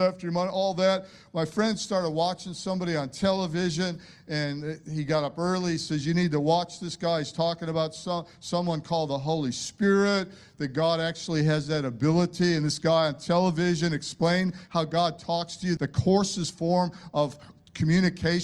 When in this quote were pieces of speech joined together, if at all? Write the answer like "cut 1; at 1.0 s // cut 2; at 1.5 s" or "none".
cut 1; at 15.8 s